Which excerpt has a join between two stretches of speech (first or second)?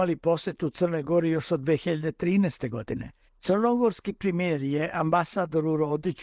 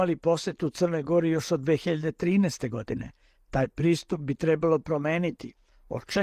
first